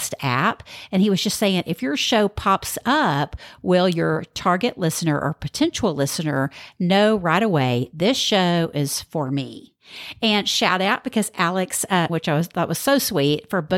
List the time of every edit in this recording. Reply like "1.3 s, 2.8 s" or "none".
12.1 s